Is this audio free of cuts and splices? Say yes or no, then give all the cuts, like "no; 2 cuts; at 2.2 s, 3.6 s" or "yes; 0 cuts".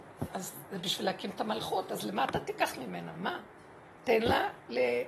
yes; 0 cuts